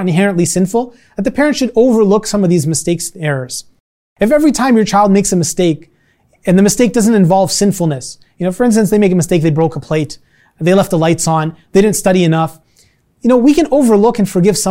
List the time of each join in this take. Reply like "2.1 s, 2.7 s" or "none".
none